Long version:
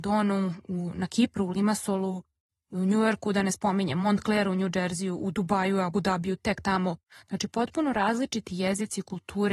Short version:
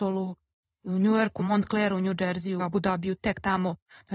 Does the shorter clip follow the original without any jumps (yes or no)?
no